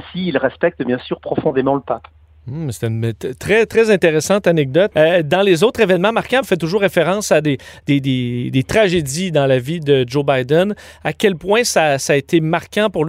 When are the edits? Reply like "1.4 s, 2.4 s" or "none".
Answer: 4.9 s, 6.4 s